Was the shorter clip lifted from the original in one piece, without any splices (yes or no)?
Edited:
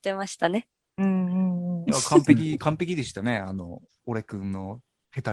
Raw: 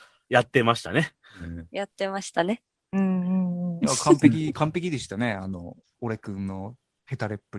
yes